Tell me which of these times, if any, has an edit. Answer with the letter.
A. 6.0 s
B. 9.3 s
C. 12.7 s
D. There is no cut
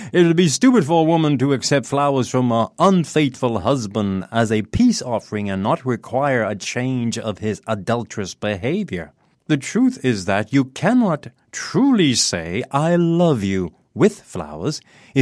B